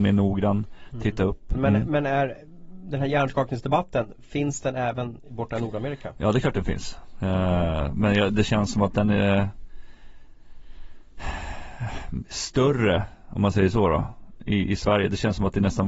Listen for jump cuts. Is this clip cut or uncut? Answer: cut